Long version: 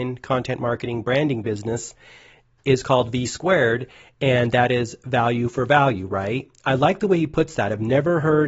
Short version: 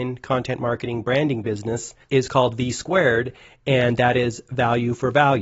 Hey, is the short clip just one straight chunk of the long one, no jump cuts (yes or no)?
no